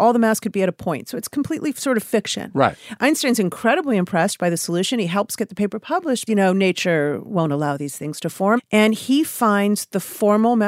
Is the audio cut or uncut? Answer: cut